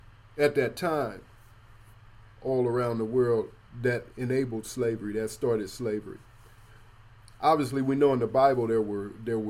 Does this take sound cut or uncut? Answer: uncut